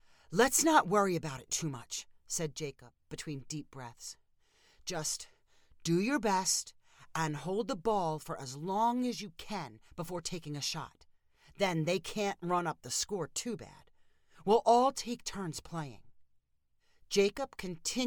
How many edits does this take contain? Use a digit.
0